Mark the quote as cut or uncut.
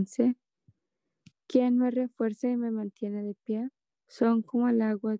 cut